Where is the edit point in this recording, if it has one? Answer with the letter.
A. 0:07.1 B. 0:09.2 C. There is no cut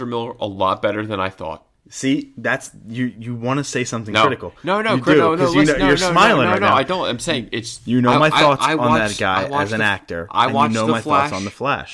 C